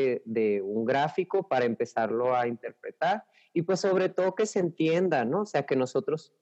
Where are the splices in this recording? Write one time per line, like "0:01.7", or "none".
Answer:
none